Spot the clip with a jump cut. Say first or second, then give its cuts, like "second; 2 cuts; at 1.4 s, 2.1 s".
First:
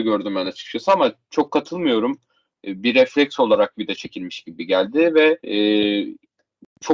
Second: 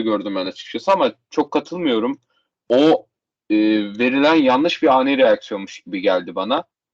first; 2 cuts; at 2.5 s, 5.4 s